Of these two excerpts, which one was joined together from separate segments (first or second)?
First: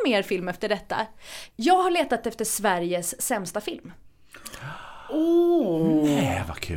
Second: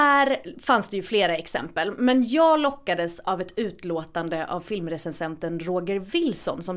first